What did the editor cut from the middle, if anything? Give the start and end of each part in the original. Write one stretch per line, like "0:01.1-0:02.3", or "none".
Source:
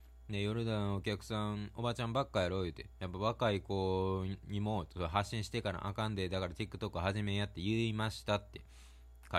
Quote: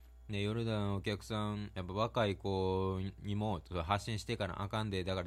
0:01.7-0:03.0